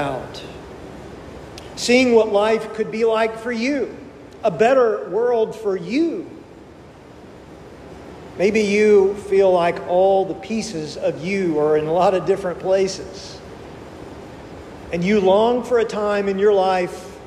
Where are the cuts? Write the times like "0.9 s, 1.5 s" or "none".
1.7 s